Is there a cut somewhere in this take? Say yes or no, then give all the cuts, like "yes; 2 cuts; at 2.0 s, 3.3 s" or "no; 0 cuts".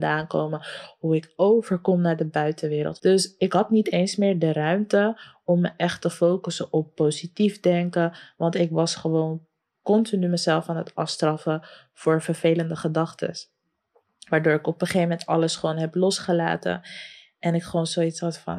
yes; 1 cut; at 3.0 s